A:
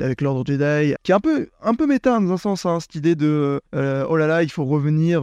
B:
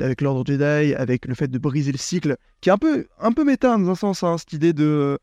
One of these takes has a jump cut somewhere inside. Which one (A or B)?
A